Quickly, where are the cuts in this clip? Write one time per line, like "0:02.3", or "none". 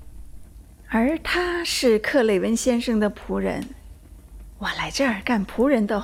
none